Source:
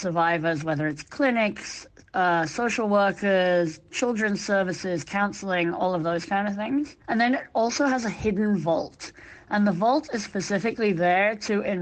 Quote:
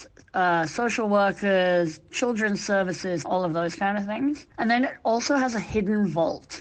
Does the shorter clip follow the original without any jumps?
no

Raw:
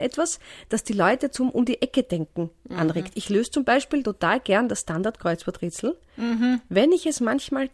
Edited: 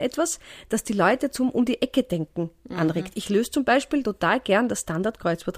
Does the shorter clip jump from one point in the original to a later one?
no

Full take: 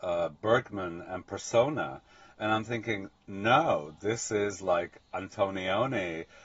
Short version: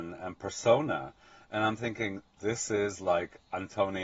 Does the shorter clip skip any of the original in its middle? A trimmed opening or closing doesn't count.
yes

